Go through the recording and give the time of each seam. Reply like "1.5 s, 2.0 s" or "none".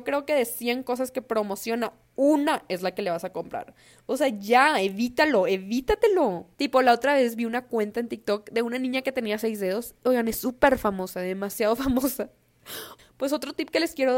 6.5 s, 10.0 s, 13.0 s